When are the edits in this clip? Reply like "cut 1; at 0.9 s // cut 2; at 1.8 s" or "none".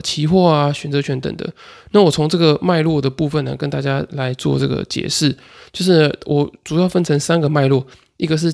cut 1; at 1.2 s